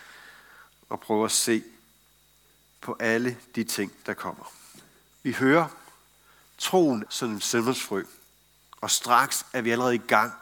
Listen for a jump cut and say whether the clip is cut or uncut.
cut